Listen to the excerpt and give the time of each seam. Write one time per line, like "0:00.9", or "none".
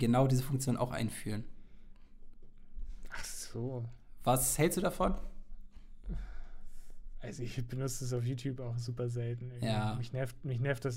none